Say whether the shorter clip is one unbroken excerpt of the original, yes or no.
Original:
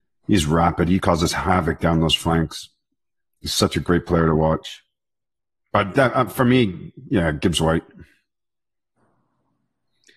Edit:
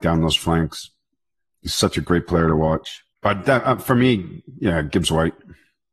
no